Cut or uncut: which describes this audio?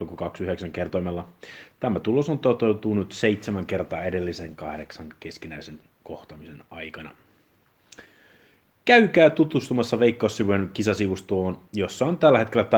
uncut